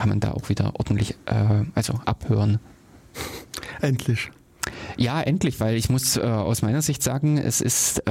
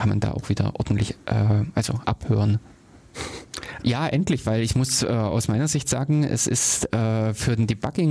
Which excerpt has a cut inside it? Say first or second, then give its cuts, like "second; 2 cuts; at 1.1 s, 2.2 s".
second; 1 cut; at 3.8 s